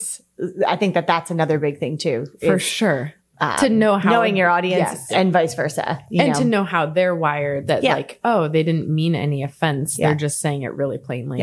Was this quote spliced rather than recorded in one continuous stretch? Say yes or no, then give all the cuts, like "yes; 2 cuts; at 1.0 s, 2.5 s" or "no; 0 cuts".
no; 0 cuts